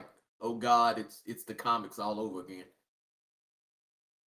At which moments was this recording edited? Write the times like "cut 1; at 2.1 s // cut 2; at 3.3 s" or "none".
none